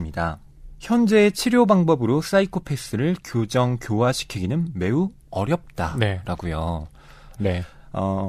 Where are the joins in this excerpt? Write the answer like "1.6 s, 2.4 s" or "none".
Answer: 7.4 s